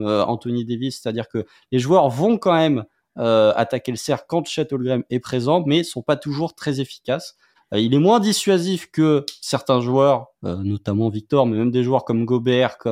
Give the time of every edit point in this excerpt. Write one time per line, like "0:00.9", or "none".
0:07.6

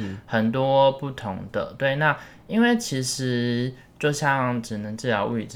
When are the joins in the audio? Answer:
none

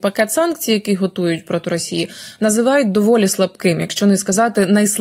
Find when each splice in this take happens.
none

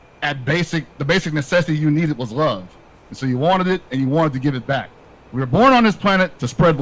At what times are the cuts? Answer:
0:00.9

